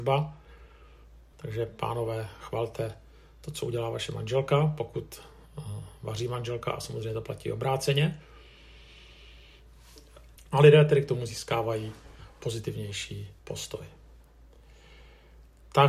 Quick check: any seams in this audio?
yes; 3 cuts; at 1.3 s, 10.4 s, 13.4 s

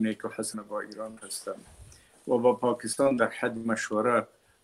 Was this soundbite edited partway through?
no; 0 cuts

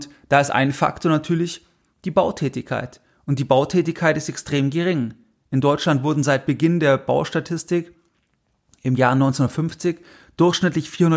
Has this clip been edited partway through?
no; 0 cuts

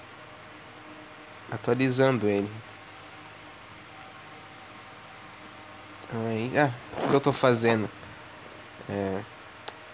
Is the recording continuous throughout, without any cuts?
yes; 0 cuts

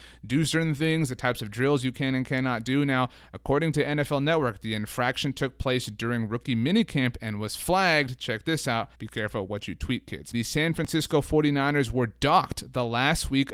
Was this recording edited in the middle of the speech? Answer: yes; 2 cuts; at 8.9 s, 10.3 s

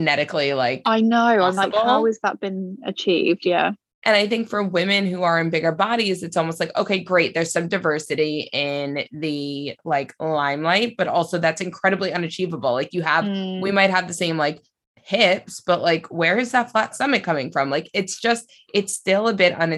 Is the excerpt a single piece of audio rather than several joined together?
yes; 0 cuts

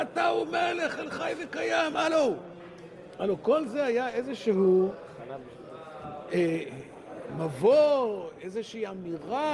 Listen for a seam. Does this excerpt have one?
no; 0 cuts

